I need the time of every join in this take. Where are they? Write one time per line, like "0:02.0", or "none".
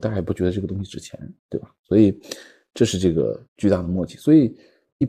0:03.4